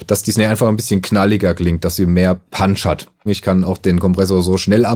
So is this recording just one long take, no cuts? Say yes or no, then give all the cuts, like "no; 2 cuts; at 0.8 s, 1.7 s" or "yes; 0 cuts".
no; 1 cut; at 3.3 s